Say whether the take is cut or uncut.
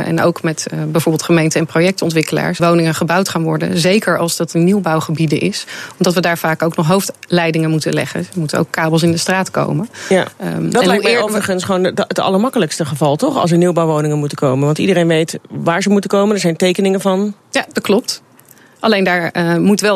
cut